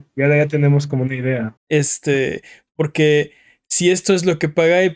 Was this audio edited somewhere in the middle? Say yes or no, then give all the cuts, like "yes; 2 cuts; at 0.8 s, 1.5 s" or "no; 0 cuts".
yes; 1 cut; at 1.6 s